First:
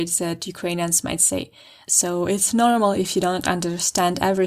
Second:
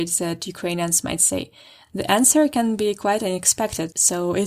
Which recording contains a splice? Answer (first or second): first